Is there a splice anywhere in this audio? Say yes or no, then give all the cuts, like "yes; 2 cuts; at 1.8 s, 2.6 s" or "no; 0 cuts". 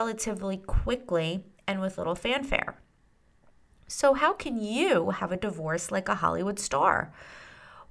no; 0 cuts